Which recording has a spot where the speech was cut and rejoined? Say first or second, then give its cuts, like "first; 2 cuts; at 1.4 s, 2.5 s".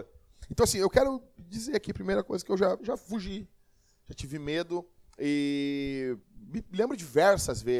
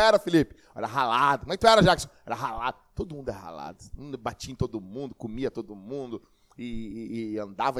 first; 2 cuts; at 2.8 s, 6.2 s